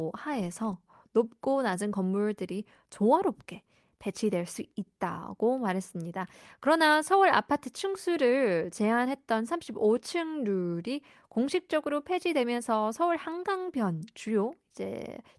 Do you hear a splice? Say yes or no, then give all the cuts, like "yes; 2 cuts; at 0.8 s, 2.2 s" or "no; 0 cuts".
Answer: no; 0 cuts